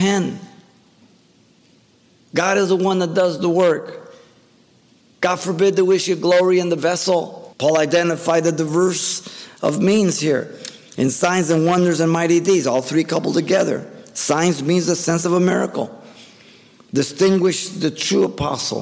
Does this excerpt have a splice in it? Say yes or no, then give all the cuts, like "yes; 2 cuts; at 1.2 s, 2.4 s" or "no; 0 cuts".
yes; 1 cut; at 7.5 s